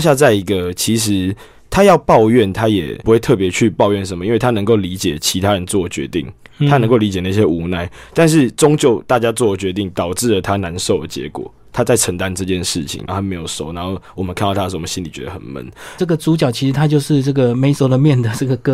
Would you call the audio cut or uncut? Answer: cut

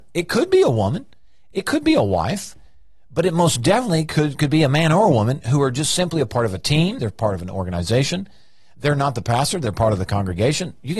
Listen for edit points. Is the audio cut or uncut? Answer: cut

